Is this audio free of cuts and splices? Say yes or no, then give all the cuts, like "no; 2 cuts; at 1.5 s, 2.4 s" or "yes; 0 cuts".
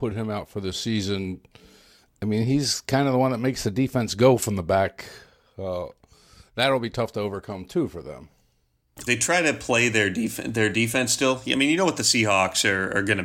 no; 1 cut; at 9.1 s